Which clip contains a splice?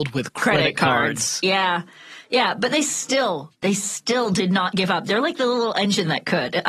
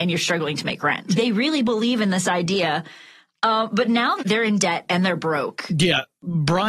second; 1 cut; at 1.2 s

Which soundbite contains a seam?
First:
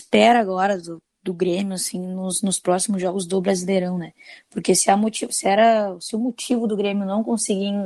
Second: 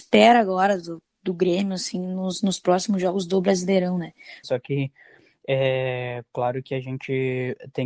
second; 1 cut; at 4.4 s

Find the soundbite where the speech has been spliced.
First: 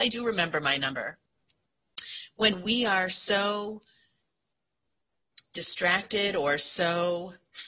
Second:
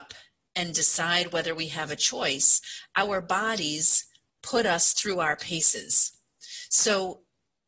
second; 1 cut; at 4.4 s

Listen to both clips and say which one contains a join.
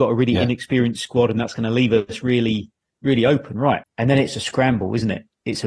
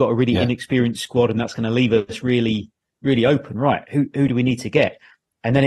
first; 1 cut; at 3.8 s

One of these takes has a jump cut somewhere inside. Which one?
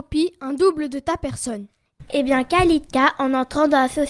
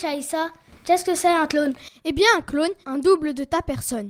second; 1 cut; at 2.8 s

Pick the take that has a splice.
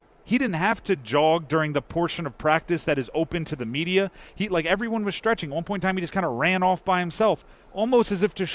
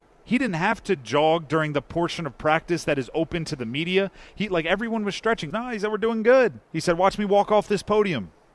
second; 2 cuts; at 5.5 s, 6.7 s

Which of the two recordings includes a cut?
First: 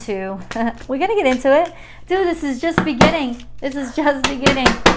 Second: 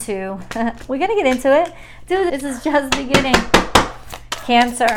second; 1 cut; at 2.3 s

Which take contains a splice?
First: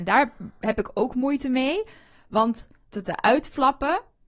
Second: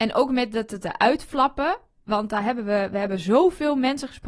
first; 1 cut; at 2.9 s

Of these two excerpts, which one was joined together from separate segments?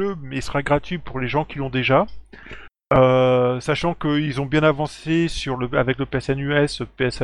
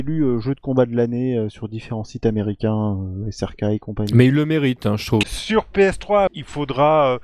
second; 2 cuts; at 5.2 s, 6.3 s

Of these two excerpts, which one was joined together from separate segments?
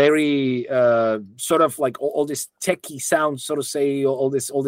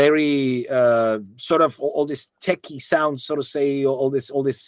second; 1 cut; at 1.8 s

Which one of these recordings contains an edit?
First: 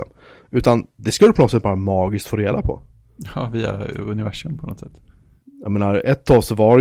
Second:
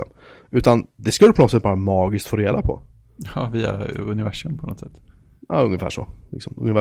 first; 1 cut; at 5.4 s

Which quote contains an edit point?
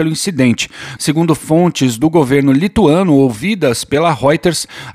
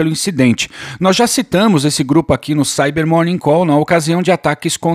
first; 1 cut; at 1.0 s

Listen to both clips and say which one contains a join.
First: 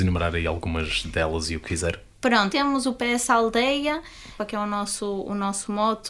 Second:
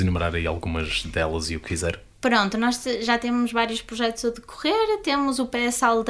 first; 2 cuts; at 2.5 s, 4.4 s

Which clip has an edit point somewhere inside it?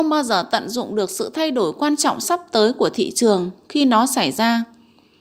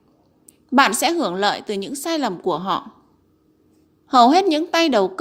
second; 1 cut; at 3.8 s

